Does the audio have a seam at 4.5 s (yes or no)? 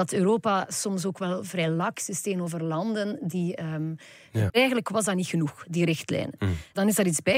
yes